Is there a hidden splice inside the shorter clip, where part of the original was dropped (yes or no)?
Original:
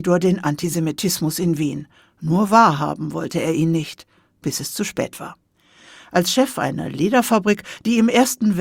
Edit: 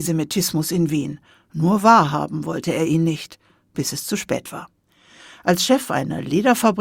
no